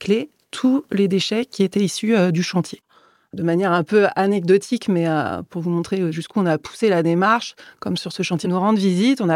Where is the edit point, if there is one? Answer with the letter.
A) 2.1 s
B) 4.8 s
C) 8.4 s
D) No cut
C